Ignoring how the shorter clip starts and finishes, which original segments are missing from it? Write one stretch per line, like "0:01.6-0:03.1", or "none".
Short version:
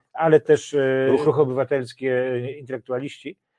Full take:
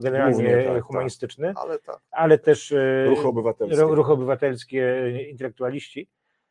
0:03.2-0:03.9